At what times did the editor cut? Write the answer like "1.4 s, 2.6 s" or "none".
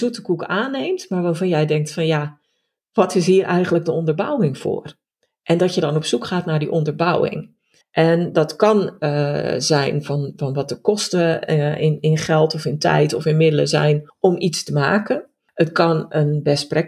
none